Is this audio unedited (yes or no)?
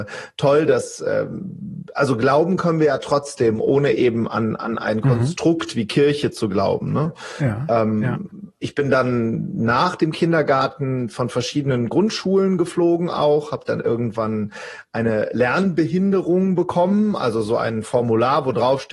yes